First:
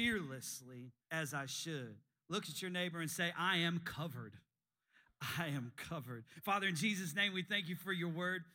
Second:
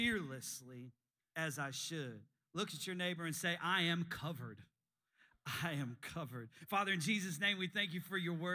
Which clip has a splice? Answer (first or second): first